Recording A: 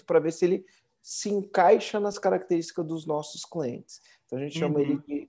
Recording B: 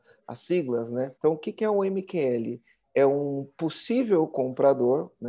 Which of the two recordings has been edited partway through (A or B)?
B